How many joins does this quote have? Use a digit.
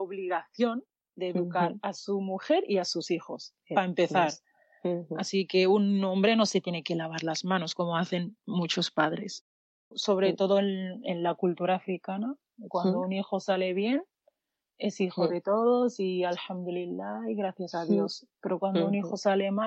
1